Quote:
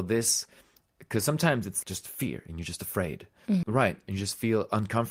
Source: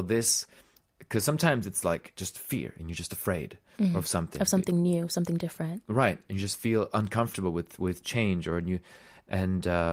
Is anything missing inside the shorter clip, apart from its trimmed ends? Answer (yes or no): yes